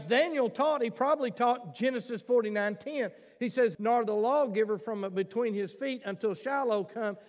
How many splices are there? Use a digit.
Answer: 1